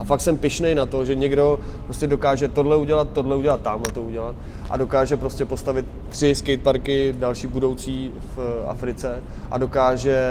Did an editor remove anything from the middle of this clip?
no; 0 cuts

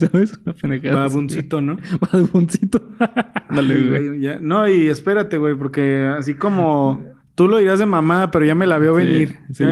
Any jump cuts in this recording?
no; 0 cuts

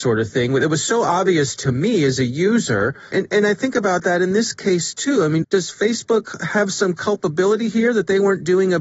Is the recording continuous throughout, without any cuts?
no; 2 cuts; at 3.1 s, 5.4 s

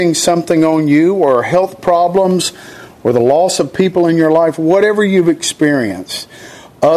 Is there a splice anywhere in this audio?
no; 0 cuts

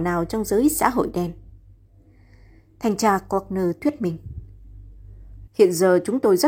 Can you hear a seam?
yes; 1 cut; at 5.5 s

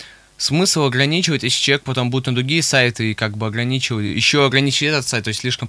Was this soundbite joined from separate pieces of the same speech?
no; 0 cuts

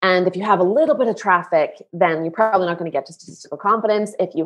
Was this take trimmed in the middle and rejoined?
no; 0 cuts

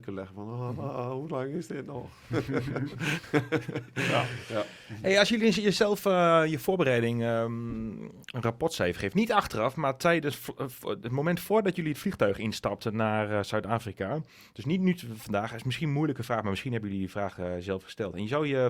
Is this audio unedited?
yes; 0 cuts

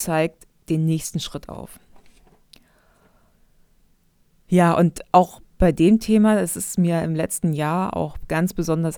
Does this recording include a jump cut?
no; 0 cuts

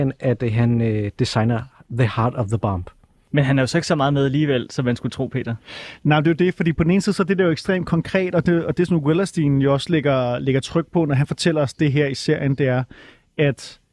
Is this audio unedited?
no; 1 cut; at 3.3 s

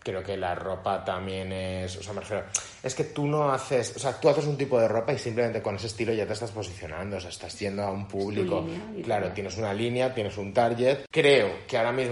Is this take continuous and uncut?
yes; 0 cuts

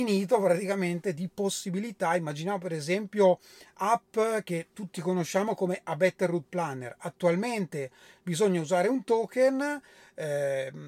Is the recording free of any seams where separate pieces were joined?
yes; 0 cuts

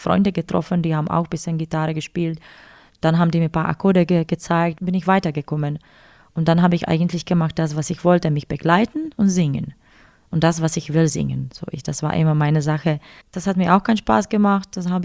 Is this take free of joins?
no; 2 cuts; at 4.8 s, 13.2 s

